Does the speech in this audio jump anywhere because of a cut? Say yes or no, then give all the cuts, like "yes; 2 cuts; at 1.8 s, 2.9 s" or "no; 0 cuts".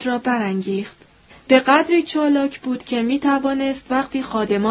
yes; 1 cut; at 1.3 s